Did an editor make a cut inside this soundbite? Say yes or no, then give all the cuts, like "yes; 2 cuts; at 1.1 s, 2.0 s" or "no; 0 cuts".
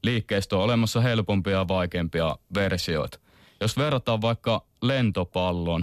no; 0 cuts